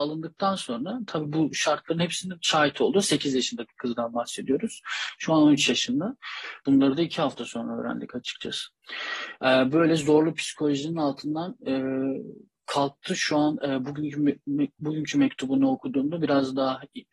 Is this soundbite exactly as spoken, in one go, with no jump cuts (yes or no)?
no